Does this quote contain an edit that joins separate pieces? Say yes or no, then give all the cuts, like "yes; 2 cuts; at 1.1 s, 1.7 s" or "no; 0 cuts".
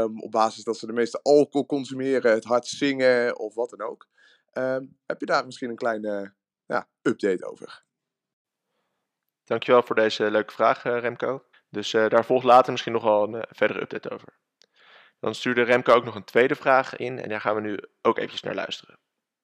yes; 1 cut; at 11.5 s